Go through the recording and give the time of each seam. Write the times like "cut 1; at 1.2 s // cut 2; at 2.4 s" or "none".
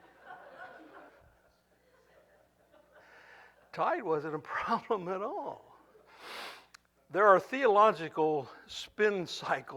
cut 1; at 1.1 s

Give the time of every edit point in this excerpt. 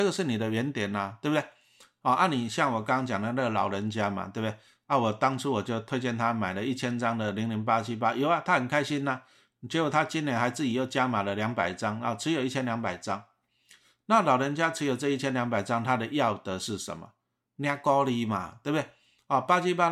none

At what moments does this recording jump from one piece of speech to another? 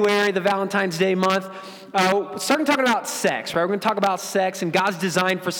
none

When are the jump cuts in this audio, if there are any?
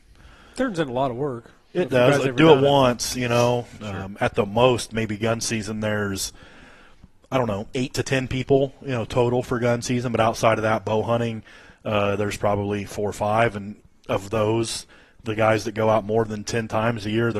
cut 1; at 3.8 s

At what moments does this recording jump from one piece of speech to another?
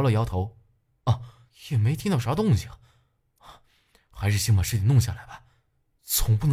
cut 1; at 1.5 s

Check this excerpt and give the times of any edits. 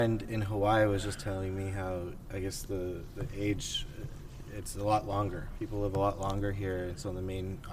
none

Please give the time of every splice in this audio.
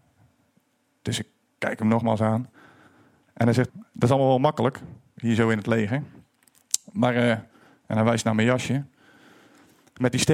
cut 1; at 3.7 s

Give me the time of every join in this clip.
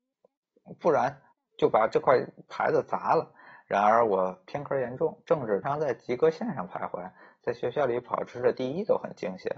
cut 1; at 5.6 s

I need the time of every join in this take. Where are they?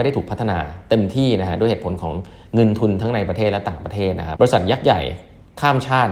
cut 1; at 4.4 s

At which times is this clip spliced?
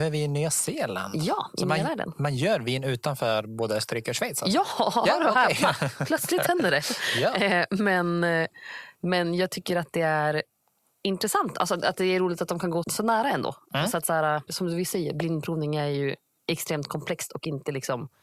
cut 1; at 12.8 s // cut 2; at 14.5 s

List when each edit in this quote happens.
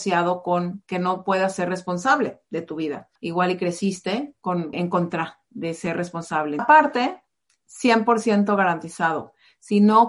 cut 1; at 3.2 s // cut 2; at 4.7 s // cut 3; at 6.6 s

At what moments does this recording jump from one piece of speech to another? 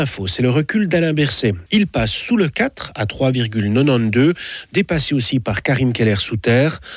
cut 1; at 1.7 s

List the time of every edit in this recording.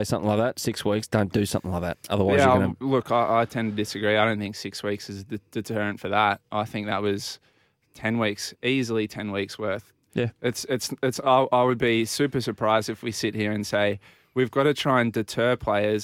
cut 1; at 8.5 s

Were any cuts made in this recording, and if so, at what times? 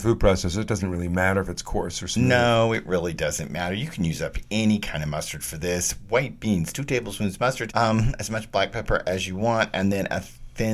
cut 1; at 7.7 s

